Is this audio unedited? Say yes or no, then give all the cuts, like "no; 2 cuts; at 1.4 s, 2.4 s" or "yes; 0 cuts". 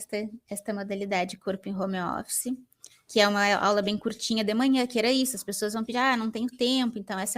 yes; 0 cuts